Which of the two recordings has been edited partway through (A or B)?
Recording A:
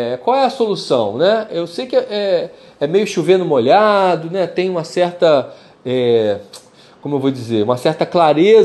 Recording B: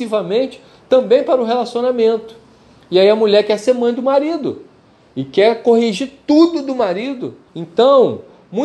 B